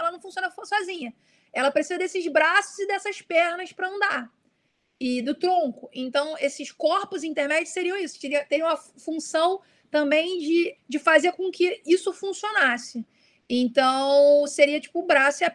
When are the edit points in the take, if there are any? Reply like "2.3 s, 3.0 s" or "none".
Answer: 10.8 s